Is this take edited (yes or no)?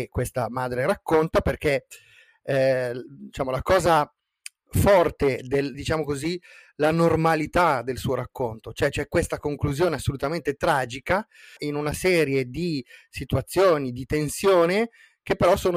yes